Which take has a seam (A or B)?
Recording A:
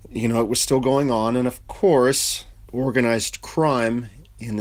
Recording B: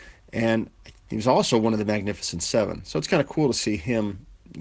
A